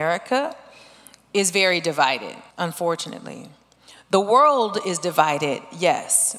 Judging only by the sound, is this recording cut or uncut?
cut